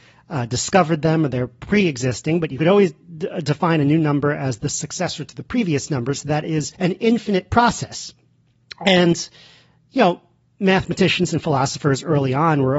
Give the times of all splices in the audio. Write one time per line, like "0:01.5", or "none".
0:06.7